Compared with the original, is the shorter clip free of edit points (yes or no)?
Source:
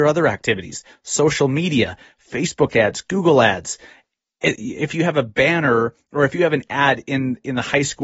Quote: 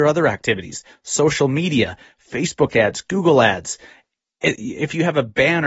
yes